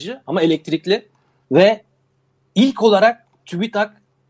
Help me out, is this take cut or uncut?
cut